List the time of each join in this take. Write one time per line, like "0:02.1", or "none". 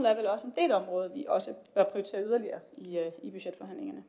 none